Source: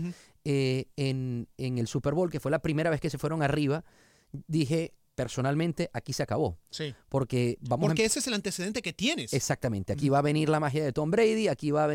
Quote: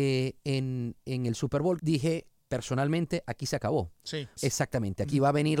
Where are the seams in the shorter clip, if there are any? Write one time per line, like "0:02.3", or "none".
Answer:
0:01.8
0:04.4